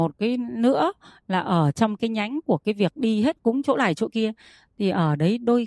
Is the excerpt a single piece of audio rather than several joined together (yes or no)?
yes